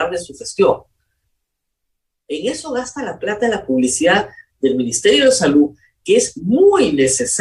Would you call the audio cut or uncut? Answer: uncut